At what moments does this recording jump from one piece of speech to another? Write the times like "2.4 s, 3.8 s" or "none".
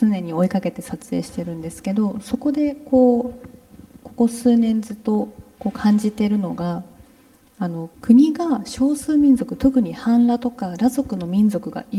7.9 s